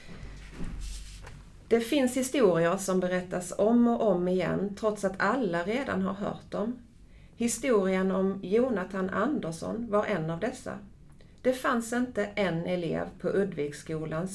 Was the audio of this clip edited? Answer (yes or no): no